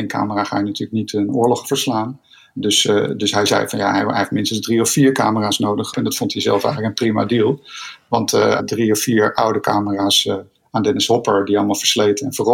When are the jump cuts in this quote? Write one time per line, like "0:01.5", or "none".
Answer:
0:05.9
0:08.6